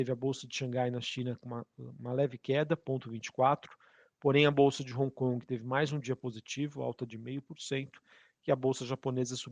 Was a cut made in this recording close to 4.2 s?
no; 0 cuts

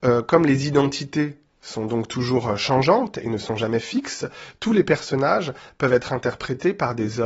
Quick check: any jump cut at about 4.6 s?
no; 0 cuts

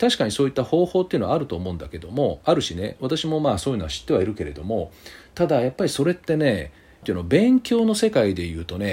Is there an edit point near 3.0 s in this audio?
no; 1 cut; at 7.0 s

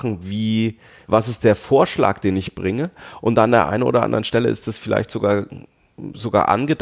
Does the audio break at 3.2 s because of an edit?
no; 1 cut; at 1.0 s

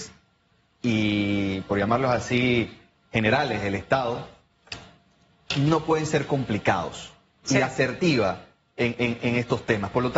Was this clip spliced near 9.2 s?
yes; 2 cuts; at 7.4 s, 9.2 s

